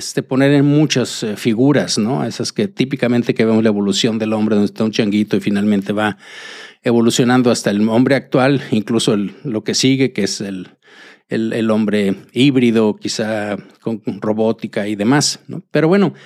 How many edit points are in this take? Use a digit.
0